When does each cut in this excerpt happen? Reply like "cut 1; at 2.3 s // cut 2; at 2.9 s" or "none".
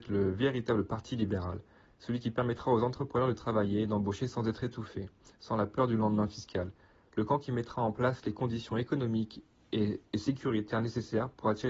none